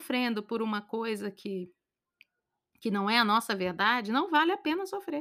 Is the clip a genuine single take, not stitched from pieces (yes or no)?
yes